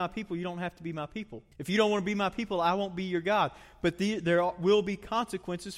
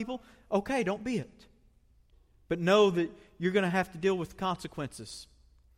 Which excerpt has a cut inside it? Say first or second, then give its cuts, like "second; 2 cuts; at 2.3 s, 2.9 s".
first; 1 cut; at 1.5 s